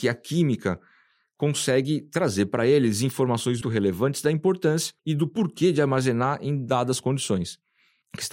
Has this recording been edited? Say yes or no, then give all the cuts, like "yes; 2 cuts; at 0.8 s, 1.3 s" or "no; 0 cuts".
yes; 2 cuts; at 3.6 s, 5.0 s